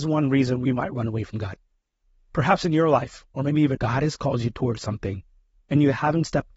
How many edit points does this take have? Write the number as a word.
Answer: one